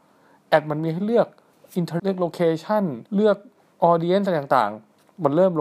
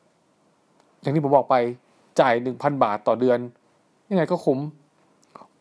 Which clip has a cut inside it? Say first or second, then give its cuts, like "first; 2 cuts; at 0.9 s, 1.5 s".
first; 2 cuts; at 2.0 s, 3.1 s